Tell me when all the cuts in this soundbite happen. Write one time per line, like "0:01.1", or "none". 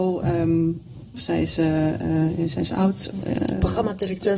0:01.1